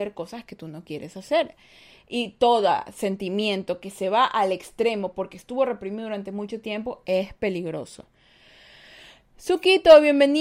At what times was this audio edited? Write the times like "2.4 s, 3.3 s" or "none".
none